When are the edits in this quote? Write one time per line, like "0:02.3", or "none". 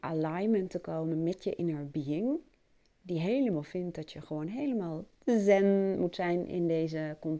none